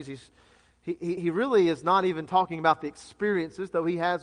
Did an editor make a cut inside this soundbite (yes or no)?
no